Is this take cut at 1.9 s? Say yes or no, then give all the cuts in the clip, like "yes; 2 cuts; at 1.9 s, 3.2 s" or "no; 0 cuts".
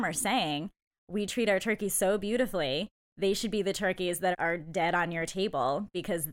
no; 1 cut; at 4.3 s